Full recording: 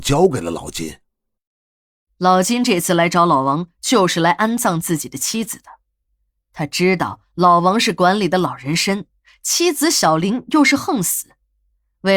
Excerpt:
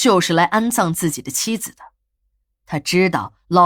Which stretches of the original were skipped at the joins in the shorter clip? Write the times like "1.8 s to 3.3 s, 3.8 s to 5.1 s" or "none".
none

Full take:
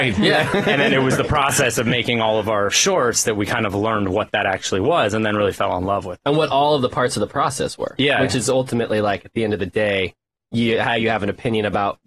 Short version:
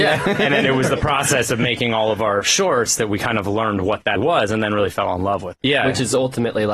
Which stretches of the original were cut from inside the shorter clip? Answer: 4.4 s to 4.8 s, 6.2 s to 8.0 s

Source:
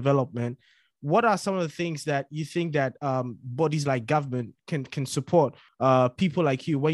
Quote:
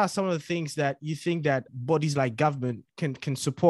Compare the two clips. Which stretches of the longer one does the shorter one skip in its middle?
3.0 s to 3.4 s

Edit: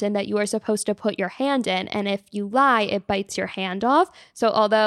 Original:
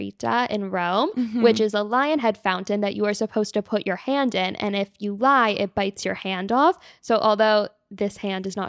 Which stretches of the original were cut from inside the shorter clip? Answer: none

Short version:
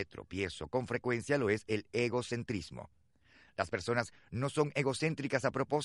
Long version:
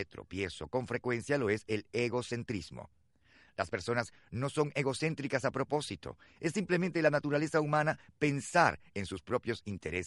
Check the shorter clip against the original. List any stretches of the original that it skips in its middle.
none

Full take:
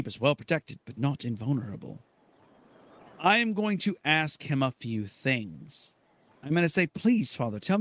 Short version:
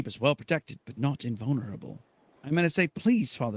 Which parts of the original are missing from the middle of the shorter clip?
2.4 s to 6.4 s

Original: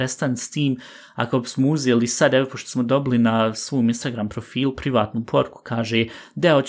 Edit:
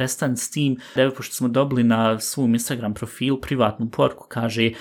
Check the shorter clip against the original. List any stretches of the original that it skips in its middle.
1.0 s to 2.3 s

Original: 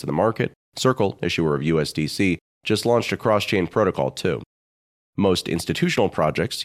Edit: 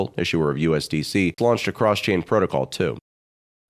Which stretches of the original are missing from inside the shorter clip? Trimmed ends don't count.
2.4 s to 2.8 s

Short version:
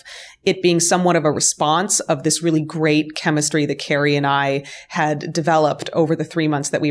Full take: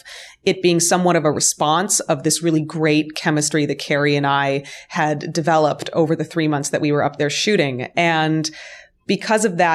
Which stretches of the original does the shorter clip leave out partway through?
none

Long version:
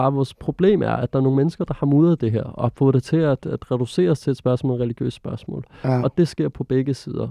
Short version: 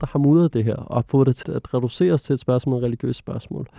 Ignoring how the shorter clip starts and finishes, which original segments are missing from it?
3.1 s to 3.4 s

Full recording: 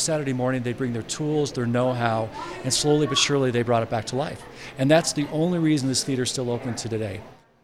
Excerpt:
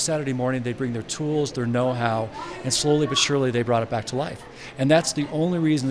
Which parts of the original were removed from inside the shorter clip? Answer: none

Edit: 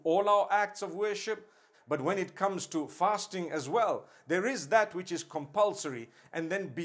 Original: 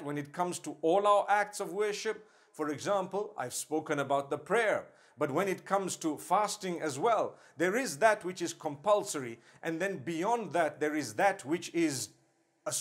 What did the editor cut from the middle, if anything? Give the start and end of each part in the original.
2.5 s to 5.0 s

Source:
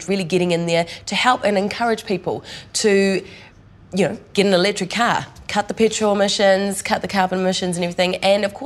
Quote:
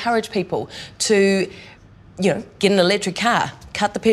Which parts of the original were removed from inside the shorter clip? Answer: none

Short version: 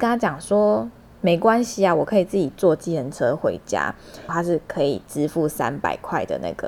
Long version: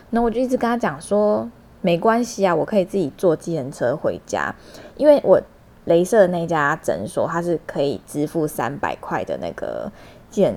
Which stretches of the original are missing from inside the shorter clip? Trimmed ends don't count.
4.9 s to 7.3 s

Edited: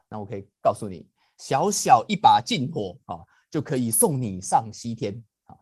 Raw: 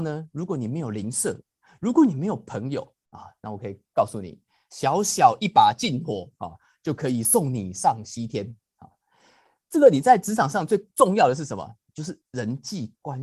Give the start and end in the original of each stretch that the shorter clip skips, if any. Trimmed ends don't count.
none

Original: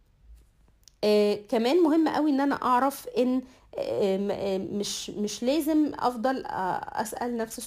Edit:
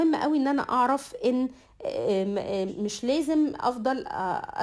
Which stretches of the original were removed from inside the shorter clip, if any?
4.6 s to 5.1 s

